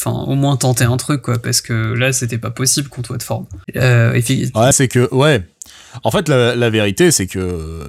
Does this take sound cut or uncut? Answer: cut